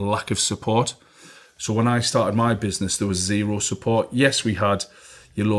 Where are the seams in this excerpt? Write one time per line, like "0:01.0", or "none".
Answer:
none